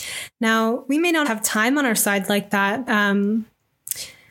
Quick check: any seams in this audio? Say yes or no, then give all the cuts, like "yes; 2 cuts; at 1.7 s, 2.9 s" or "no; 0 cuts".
yes; 2 cuts; at 1.2 s, 2.9 s